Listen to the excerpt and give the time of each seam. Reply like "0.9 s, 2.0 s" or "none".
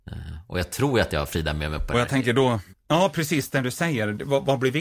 2.7 s